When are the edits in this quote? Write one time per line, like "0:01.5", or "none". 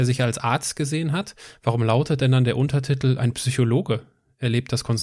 none